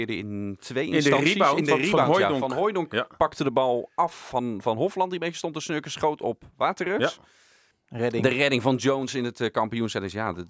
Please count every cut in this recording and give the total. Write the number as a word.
one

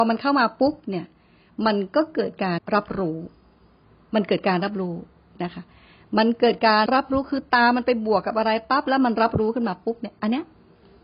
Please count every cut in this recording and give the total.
two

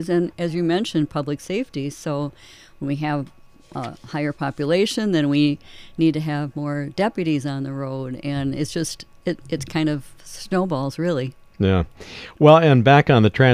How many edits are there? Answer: zero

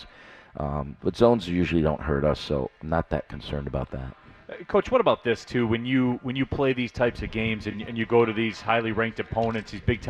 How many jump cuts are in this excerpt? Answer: zero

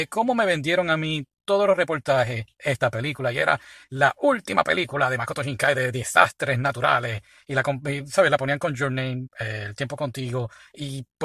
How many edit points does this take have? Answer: zero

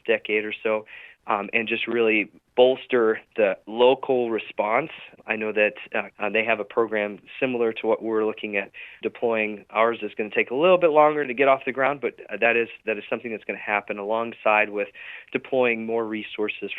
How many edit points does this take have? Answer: one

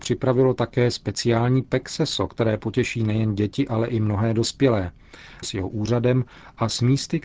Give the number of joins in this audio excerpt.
one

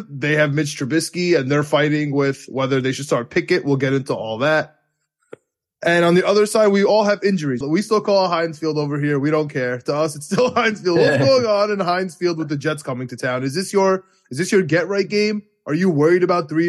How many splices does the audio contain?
one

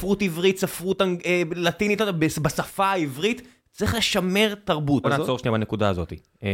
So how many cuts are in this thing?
one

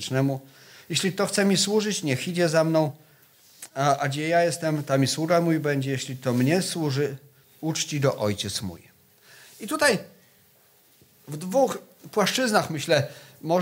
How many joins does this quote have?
one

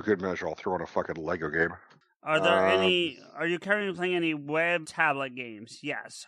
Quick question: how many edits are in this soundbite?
one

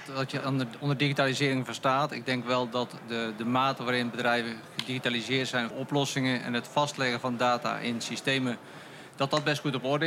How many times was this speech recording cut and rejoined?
one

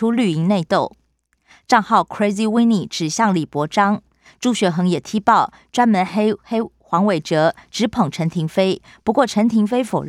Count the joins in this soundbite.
zero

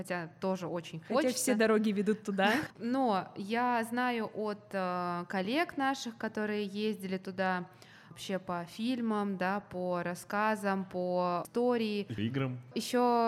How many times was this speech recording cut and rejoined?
one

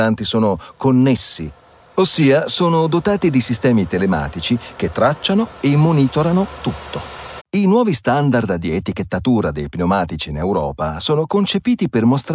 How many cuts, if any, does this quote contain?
one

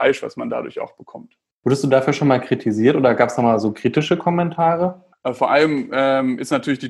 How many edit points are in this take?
one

